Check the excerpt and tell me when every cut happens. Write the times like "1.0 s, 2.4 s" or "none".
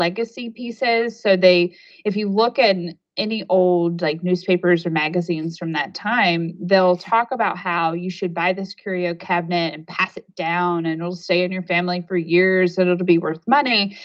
none